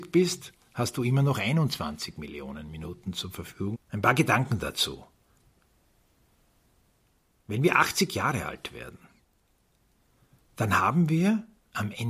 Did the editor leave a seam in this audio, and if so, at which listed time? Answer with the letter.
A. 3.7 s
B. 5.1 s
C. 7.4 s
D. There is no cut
A